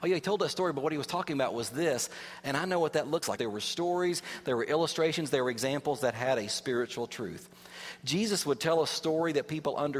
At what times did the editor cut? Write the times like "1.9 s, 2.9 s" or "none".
3.4 s